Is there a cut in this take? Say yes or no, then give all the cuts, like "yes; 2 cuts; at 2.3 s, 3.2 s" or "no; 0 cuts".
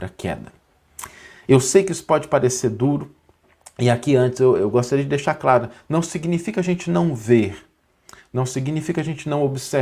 no; 0 cuts